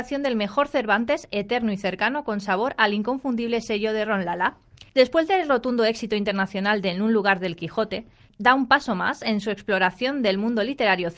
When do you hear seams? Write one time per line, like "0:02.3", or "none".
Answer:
0:04.9
0:08.3